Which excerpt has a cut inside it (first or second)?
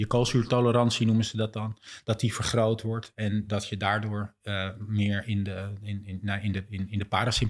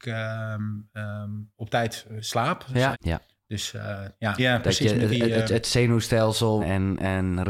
second